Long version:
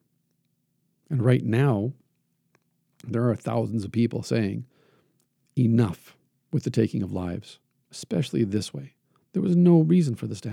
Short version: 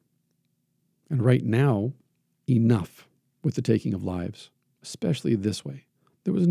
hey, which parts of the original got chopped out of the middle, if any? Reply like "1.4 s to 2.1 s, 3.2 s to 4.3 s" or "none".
2.4 s to 5.5 s